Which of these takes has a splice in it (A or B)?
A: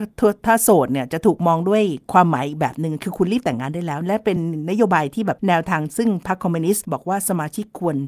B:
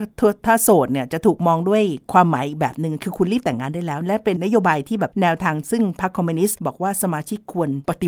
B